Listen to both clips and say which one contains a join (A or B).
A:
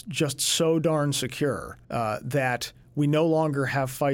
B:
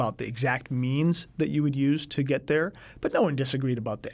A